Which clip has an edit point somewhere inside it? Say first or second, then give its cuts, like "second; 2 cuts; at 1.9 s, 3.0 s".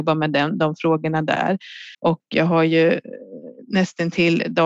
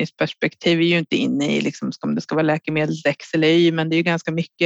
first; 1 cut; at 1.9 s